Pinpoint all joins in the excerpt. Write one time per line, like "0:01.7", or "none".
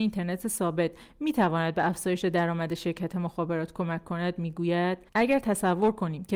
0:05.1